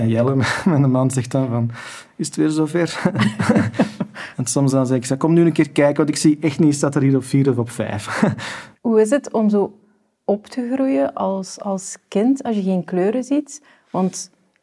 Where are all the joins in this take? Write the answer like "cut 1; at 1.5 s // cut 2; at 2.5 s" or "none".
cut 1; at 8.7 s